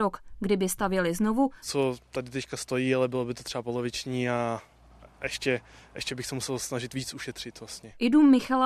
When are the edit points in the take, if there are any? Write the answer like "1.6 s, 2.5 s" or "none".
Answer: 1.6 s